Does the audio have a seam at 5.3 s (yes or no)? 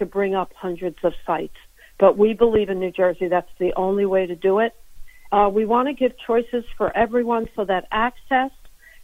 yes